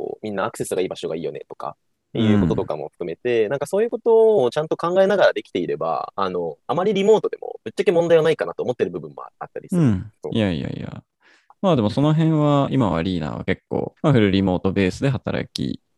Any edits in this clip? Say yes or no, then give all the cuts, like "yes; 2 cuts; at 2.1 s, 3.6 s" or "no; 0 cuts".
yes; 2 cuts; at 10.2 s, 14.0 s